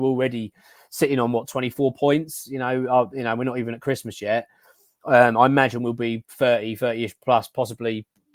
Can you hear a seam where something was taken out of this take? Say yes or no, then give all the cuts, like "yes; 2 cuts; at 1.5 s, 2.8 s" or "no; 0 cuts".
no; 0 cuts